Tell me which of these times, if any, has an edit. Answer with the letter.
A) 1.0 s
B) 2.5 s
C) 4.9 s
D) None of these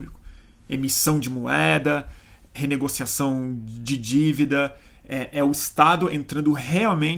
B